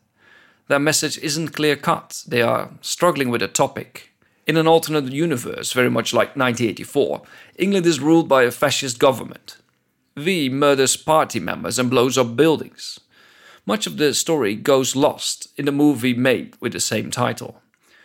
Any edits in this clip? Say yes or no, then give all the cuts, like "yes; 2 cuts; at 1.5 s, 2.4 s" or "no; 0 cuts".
yes; 1 cut; at 4.3 s